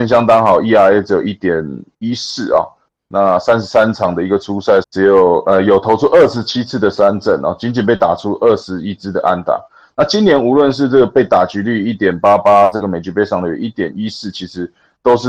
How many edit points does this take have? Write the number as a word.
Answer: one